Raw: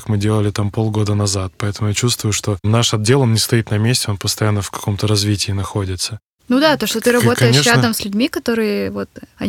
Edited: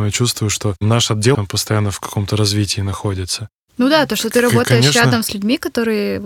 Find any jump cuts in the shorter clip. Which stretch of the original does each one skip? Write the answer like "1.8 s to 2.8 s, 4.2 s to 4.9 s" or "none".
3.2 s to 4.1 s